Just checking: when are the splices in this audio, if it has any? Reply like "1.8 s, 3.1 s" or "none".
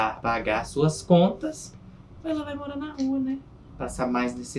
none